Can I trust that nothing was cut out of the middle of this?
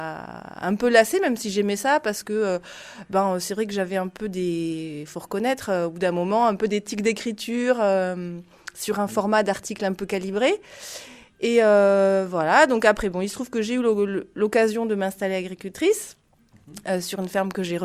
yes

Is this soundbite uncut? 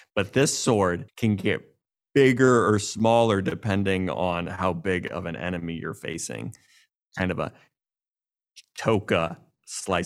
no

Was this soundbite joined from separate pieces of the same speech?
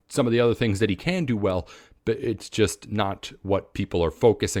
no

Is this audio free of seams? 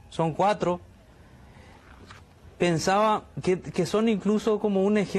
no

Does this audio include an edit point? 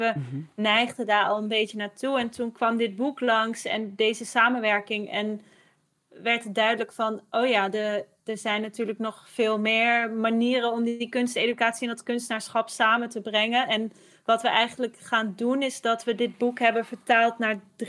no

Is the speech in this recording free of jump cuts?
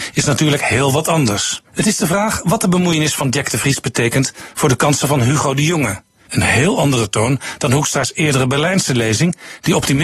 no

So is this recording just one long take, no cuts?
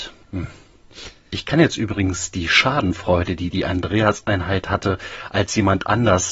yes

